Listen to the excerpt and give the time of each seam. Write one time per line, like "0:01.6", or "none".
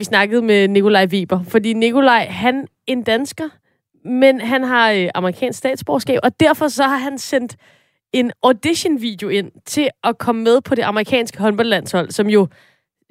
0:02.8